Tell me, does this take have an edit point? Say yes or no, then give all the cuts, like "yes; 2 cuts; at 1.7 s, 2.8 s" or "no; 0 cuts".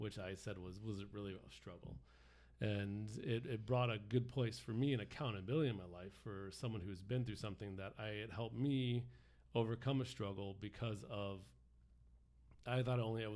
no; 0 cuts